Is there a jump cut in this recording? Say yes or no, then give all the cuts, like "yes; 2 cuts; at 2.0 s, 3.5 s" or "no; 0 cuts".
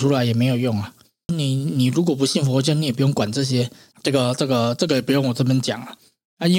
yes; 2 cuts; at 1.3 s, 3.9 s